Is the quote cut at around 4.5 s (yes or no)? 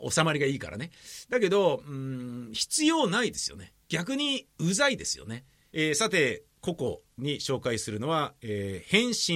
no